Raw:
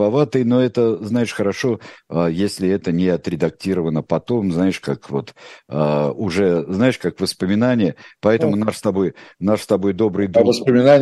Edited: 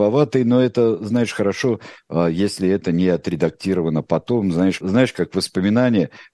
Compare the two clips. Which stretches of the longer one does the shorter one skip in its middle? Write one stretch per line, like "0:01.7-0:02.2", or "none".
0:04.8-0:06.7